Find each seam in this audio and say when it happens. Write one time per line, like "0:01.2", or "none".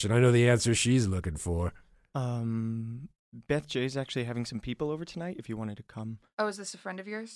none